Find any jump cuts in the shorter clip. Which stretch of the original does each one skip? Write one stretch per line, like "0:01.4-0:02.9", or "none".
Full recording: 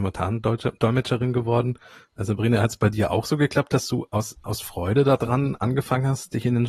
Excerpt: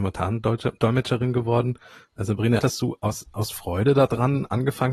0:02.6-0:03.7

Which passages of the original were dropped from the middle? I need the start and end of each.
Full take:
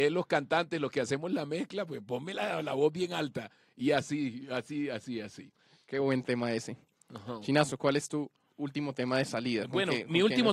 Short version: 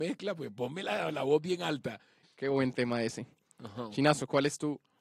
0:03.7-0:05.7

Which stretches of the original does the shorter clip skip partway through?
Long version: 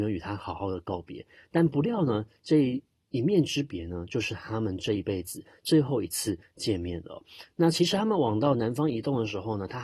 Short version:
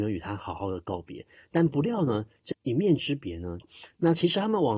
0:02.5-0:03.0
0:04.1-0:07.2

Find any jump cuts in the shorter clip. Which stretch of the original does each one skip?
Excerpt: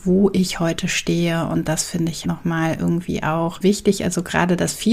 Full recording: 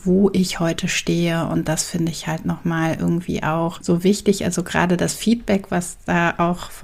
0:02.2-0:02.4
0:03.8-0:04.0

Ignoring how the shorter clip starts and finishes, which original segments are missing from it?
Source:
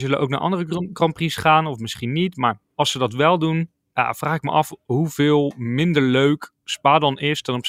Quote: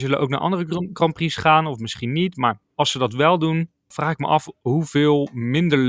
0:03.9-0:04.1

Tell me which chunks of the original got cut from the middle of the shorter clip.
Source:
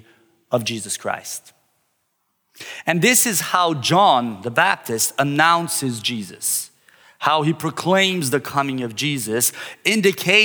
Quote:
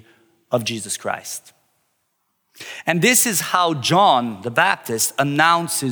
none

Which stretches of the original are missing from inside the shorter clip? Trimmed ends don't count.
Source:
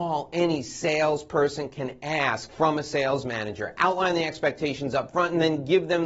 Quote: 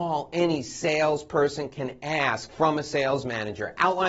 none

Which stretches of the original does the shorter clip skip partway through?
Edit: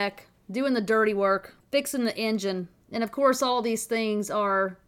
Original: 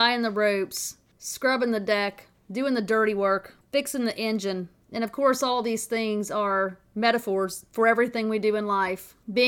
none

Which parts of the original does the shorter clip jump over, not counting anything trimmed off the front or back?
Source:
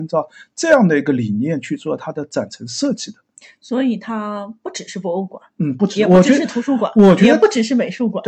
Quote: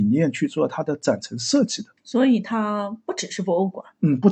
0:03.3-0:03.5

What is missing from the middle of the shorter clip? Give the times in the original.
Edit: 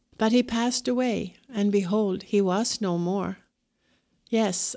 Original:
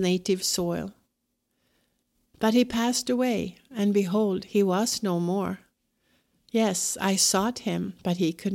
none

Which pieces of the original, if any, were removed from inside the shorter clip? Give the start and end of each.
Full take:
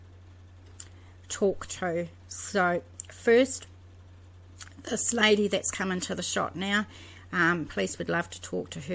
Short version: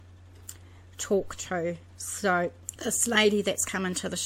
0:03.1-0:04.8

